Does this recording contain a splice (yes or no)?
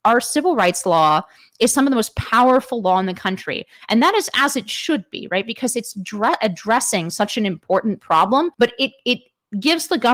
yes